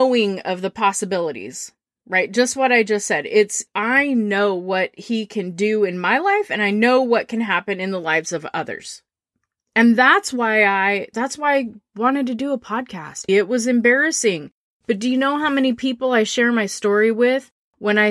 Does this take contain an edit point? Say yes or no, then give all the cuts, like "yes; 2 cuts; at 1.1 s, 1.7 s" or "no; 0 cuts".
yes; 2 cuts; at 13.3 s, 14.7 s